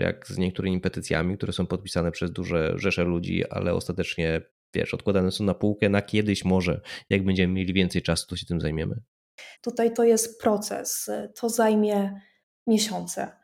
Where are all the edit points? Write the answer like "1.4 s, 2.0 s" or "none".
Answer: 9.5 s